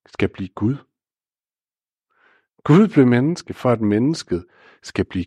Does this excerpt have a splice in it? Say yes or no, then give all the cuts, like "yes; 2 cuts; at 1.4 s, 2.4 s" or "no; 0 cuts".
no; 0 cuts